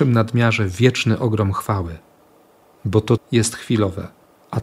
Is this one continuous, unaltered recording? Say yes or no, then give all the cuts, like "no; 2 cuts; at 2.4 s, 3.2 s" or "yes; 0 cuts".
no; 1 cut; at 3.2 s